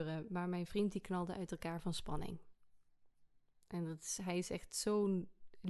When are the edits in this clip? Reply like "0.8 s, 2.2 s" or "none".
none